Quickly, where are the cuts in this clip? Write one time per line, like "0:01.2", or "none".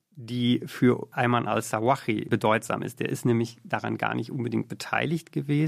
none